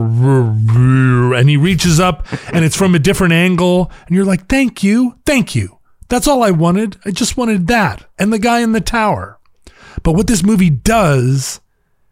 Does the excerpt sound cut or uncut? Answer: uncut